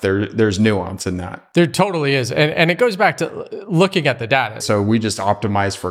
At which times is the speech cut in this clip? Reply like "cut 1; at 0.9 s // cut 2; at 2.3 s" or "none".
cut 1; at 4.6 s